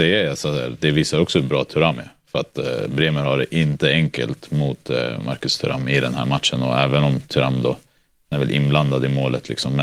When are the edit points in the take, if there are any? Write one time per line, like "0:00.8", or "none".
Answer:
none